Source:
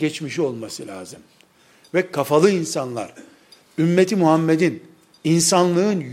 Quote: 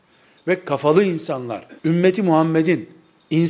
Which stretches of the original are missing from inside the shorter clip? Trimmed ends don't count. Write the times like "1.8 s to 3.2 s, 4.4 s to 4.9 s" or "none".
3.2 s to 3.7 s